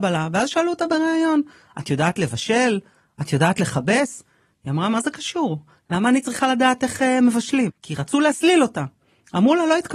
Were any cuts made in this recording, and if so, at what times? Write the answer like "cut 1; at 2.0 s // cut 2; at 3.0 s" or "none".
cut 1; at 7.7 s